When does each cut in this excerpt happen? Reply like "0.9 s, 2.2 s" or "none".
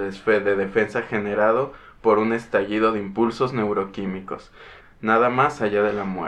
4.8 s